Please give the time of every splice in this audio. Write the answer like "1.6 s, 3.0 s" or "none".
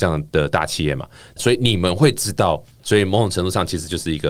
2.8 s